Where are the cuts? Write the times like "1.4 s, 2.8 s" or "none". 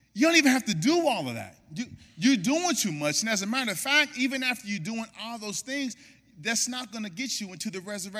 none